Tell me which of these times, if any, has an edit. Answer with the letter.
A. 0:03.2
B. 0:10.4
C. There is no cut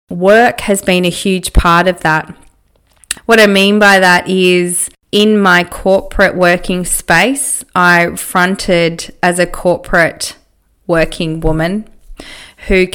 A